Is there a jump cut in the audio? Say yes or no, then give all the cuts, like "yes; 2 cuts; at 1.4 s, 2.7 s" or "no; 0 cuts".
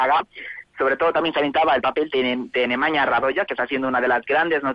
no; 0 cuts